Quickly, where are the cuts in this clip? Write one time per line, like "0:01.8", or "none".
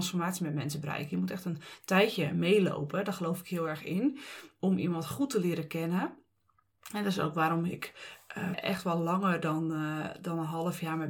0:08.5